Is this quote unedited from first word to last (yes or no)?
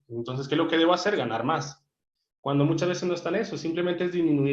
yes